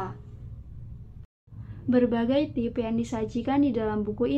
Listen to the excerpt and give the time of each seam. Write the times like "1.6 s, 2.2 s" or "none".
none